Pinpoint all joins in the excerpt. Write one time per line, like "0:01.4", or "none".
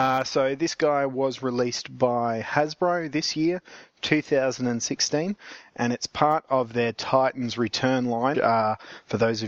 0:08.3

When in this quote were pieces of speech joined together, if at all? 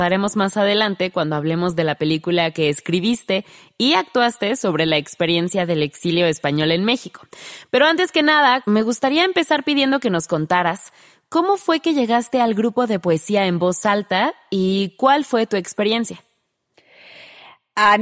0:08.6

